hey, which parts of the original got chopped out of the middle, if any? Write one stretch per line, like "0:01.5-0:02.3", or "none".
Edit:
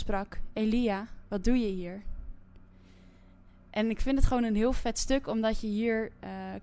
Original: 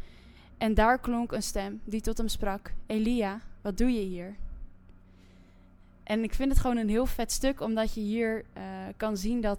none